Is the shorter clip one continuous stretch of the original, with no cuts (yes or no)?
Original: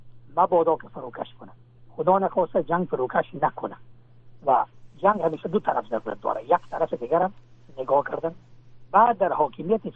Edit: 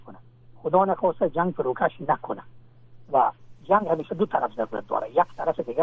yes